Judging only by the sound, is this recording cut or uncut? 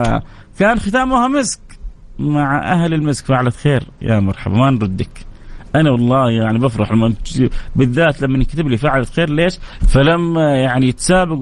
cut